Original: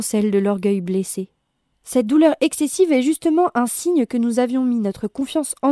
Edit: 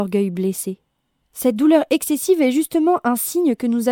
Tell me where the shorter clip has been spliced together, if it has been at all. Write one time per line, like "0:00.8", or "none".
none